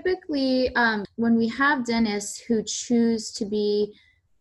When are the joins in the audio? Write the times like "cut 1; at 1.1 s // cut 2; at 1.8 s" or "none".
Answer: cut 1; at 1.0 s